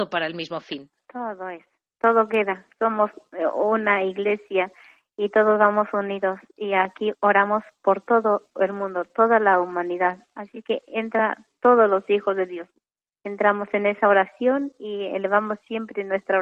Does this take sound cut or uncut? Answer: uncut